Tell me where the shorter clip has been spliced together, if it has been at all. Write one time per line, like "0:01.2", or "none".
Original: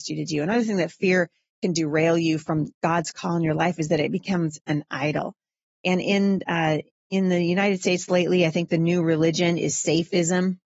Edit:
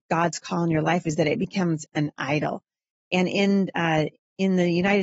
none